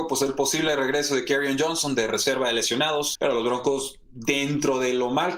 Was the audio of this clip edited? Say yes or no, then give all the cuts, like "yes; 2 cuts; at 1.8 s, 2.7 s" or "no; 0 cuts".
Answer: yes; 1 cut; at 3.2 s